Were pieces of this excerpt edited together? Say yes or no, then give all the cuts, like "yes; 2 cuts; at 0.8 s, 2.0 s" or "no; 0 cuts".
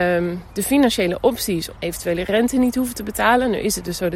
yes; 1 cut; at 1.8 s